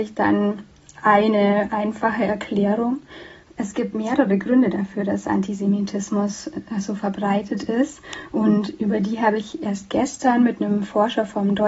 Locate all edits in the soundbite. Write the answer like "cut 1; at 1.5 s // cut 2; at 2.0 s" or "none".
cut 1; at 3.6 s